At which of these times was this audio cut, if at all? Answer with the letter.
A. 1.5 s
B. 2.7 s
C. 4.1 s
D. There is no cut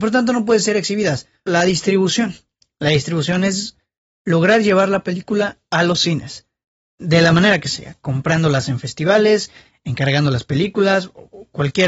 A